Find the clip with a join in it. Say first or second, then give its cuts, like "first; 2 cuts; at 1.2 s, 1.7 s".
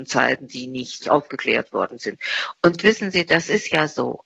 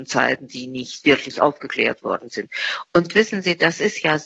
first; 1 cut; at 1.0 s